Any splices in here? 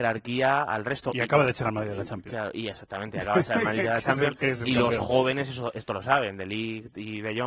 no; 0 cuts

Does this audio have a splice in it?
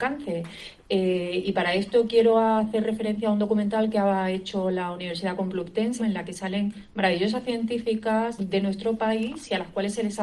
yes; 2 cuts; at 6.0 s, 8.4 s

